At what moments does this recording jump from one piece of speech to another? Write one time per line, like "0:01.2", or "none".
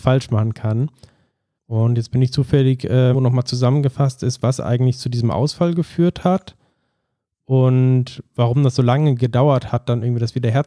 0:01.6
0:03.1

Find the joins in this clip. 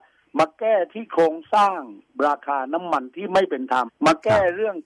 0:03.9

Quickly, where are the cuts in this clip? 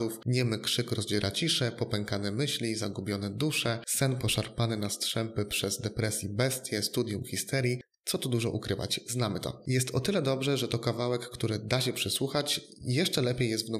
none

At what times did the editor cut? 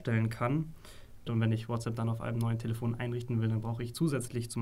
0:01.3

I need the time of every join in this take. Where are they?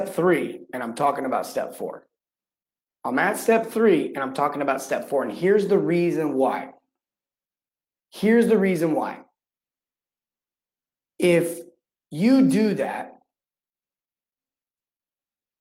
none

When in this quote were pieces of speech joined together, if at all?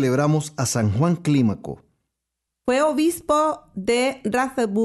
0:02.5

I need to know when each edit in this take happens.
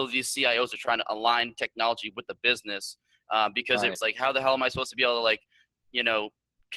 0:04.0

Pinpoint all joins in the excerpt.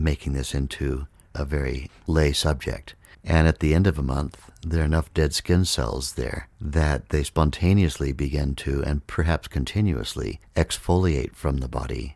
0:03.1

